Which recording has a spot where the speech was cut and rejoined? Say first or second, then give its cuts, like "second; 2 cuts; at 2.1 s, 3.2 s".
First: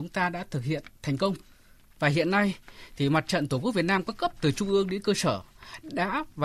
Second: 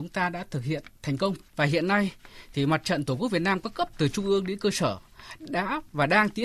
second; 1 cut; at 1.5 s